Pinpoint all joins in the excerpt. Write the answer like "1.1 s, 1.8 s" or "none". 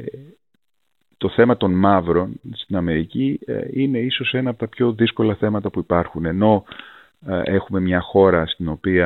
none